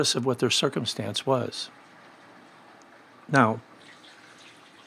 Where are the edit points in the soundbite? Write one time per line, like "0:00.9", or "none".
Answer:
none